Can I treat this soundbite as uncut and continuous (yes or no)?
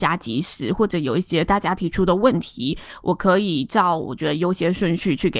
yes